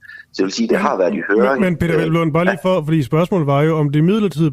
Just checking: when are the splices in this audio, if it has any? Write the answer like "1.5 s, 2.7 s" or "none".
none